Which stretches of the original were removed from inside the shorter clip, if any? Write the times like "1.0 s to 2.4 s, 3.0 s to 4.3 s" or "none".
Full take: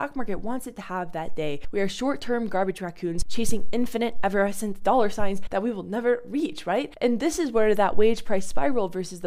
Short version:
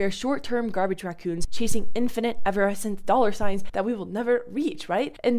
none